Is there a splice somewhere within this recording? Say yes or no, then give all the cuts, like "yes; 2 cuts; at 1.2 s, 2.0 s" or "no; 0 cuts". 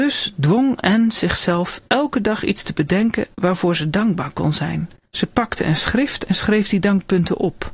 no; 0 cuts